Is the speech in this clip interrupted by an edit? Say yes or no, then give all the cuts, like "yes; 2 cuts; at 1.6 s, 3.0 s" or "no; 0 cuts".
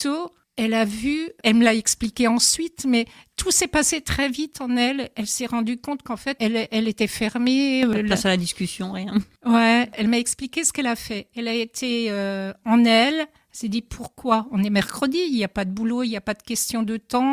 yes; 1 cut; at 6.4 s